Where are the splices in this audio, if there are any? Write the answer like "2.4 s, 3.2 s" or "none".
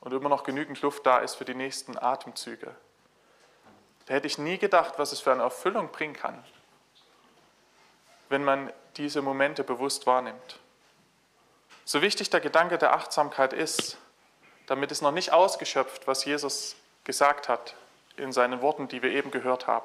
11.8 s